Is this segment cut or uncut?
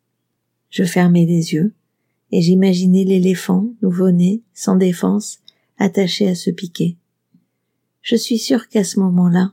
uncut